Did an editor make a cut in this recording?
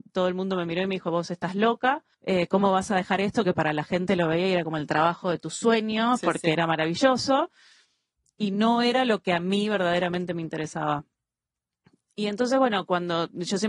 yes; 1 cut; at 2.1 s

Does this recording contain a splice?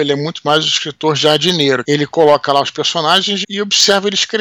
yes; 2 cuts; at 1.8 s, 3.4 s

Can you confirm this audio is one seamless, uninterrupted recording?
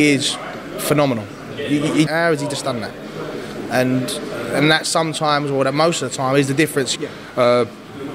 no; 2 cuts; at 2.1 s, 7.0 s

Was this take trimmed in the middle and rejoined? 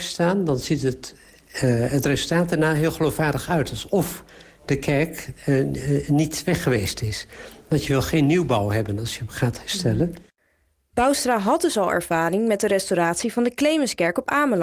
no; 0 cuts

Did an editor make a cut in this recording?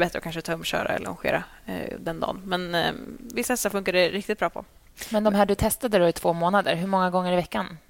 no; 0 cuts

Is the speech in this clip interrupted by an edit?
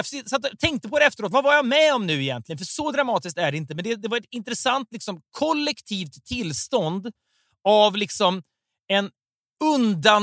no; 0 cuts

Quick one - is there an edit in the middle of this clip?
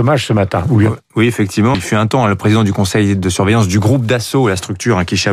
yes; 1 cut; at 1.7 s

